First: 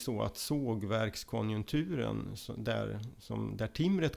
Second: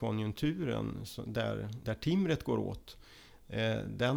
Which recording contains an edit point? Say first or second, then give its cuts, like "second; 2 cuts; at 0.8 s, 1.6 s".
second; 1 cut; at 1.8 s